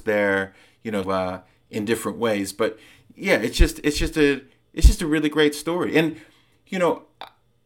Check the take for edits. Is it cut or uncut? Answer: cut